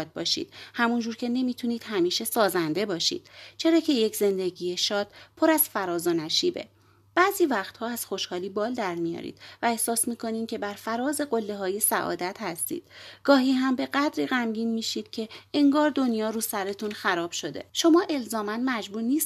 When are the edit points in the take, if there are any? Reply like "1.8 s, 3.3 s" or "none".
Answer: 17.7 s